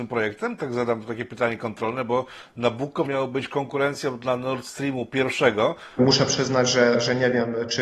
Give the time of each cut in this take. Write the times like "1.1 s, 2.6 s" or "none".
3.1 s, 6.0 s

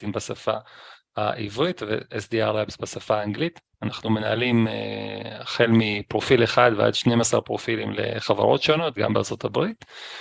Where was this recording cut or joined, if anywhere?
3.7 s, 9.0 s

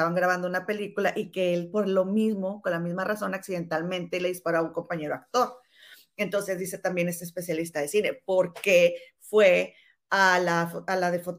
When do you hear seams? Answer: none

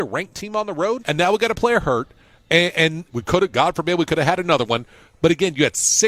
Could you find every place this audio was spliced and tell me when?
1.0 s, 3.1 s

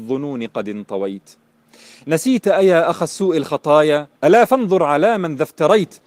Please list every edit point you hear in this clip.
4.1 s

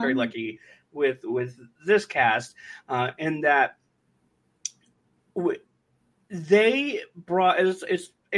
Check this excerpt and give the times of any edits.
none

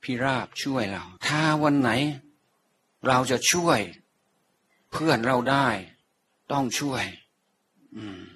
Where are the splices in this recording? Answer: 1.2 s

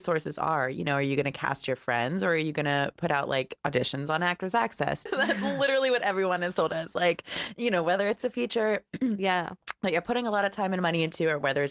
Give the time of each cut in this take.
5.1 s

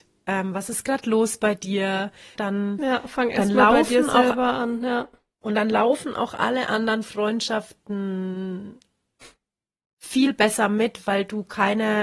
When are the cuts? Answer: 2.4 s, 5.4 s

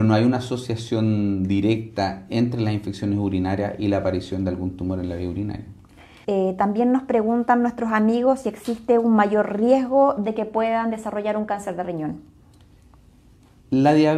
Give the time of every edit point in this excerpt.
6.2 s

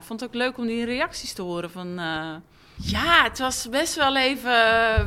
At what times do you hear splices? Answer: 2.8 s

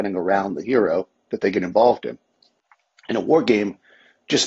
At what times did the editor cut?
none

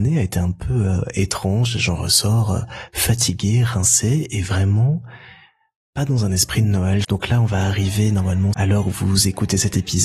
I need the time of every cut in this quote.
7.0 s, 8.5 s

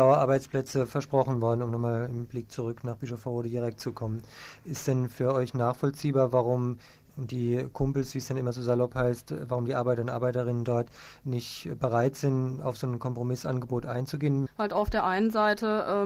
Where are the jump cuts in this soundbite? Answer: 14.5 s

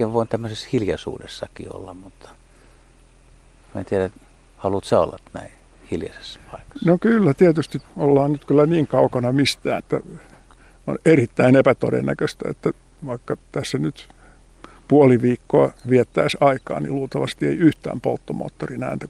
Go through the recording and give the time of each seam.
7.9 s, 9.8 s, 15.8 s

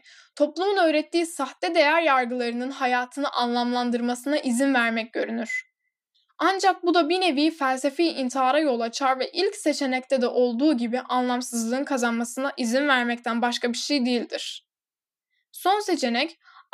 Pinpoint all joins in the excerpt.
none

